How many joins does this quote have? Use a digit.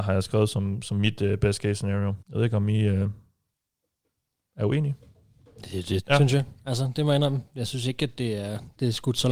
2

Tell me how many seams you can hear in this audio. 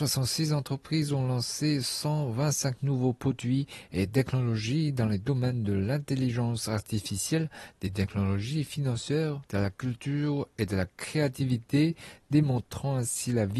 1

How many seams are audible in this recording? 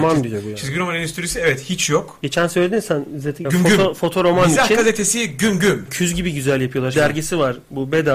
3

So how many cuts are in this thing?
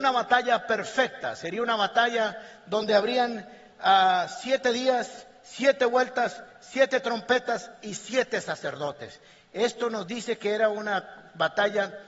0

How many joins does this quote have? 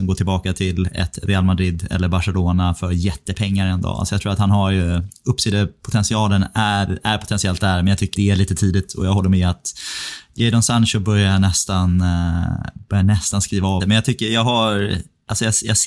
2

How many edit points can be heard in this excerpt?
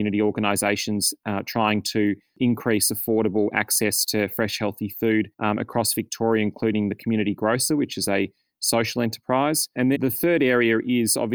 2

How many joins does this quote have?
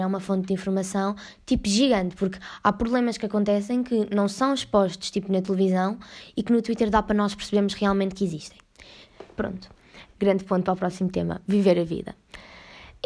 1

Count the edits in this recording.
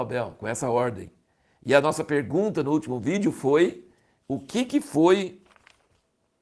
0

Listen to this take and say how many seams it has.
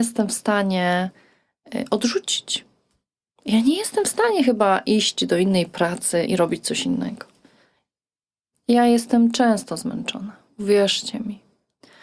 1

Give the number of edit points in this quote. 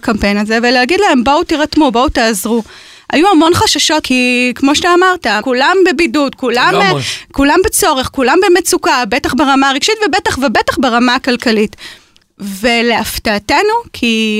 2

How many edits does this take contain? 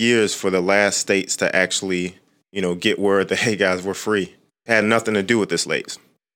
1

